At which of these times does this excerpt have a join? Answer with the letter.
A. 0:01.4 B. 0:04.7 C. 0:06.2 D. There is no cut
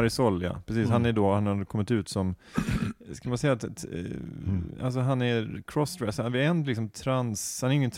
D